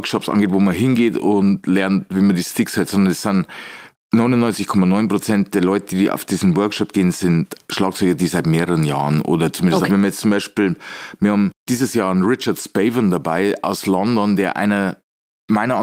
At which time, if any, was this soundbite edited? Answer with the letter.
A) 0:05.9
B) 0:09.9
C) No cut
B